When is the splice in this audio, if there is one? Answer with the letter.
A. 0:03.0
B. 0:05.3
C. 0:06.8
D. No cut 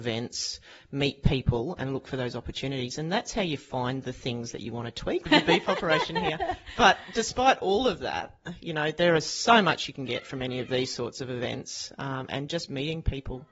B